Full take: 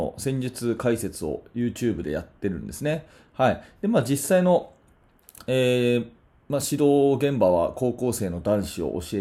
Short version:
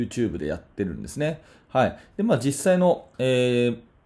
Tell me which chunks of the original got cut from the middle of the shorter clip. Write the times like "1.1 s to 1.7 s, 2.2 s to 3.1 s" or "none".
4.8 s to 5.4 s